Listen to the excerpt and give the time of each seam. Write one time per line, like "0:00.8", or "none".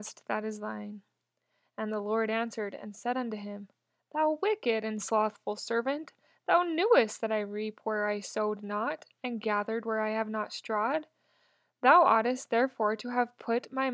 none